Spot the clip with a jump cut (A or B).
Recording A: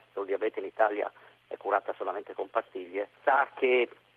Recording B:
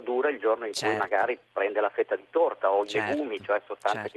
A